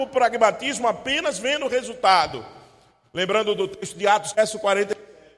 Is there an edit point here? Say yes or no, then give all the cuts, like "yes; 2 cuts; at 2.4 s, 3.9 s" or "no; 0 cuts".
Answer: yes; 1 cut; at 4.3 s